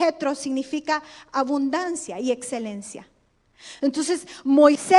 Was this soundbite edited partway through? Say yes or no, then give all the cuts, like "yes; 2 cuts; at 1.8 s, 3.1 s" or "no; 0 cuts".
no; 0 cuts